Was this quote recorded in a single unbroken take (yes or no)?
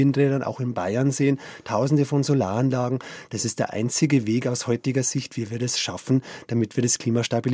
yes